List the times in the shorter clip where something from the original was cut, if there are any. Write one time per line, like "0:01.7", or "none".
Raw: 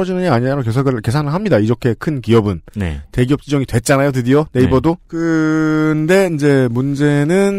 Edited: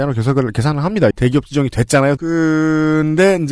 0:01.1
0:02.2